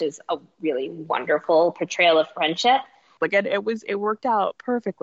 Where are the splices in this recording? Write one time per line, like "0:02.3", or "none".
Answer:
0:03.2